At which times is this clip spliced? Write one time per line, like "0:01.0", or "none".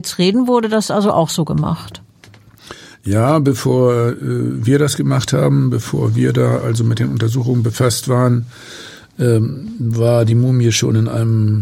none